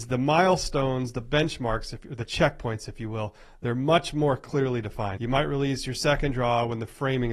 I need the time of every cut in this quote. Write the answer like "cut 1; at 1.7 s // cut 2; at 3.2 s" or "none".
cut 1; at 5.2 s